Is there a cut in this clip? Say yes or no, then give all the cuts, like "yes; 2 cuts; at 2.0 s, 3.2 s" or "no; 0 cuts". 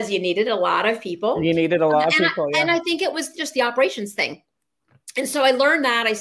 no; 0 cuts